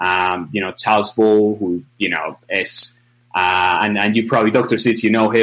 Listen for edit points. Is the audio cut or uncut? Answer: uncut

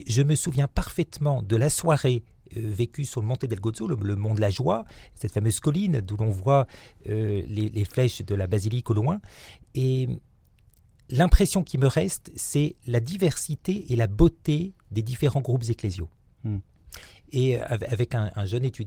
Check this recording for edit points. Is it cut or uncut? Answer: uncut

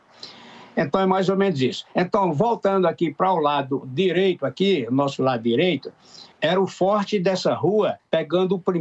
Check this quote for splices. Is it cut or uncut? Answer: cut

